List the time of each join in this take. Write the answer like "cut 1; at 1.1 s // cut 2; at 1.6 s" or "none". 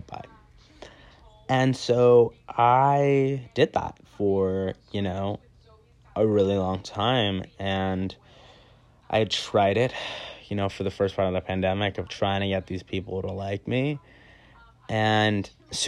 cut 1; at 12.1 s